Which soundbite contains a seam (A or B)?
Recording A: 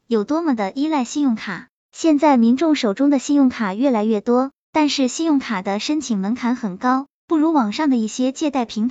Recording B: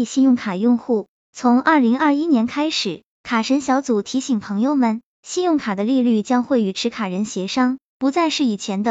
A